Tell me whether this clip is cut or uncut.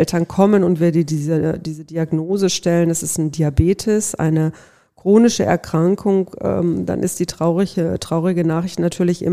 uncut